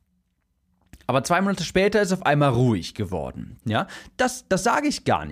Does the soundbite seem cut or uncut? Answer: cut